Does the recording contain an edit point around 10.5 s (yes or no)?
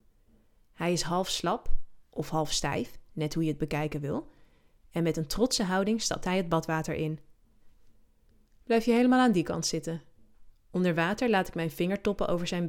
yes